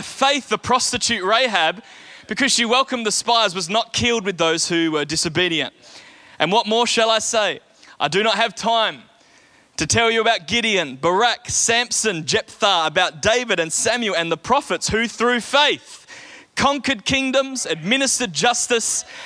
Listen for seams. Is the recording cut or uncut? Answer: uncut